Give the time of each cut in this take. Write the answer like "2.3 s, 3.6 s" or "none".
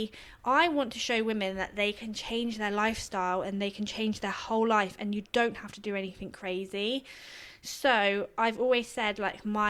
none